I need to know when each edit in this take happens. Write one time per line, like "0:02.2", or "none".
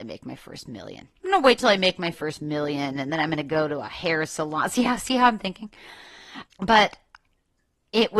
0:01.2
0:06.5